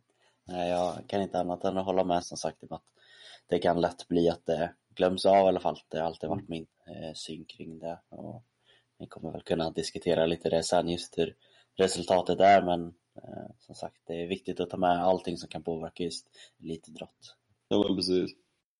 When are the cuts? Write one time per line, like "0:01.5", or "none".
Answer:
0:02.2